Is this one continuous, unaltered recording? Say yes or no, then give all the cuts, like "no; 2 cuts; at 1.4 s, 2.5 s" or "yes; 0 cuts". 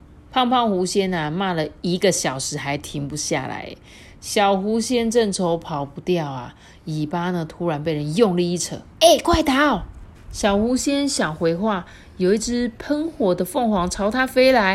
no; 2 cuts; at 8.9 s, 10.1 s